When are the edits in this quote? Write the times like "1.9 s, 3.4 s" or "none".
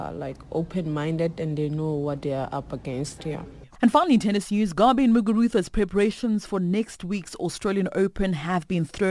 3.2 s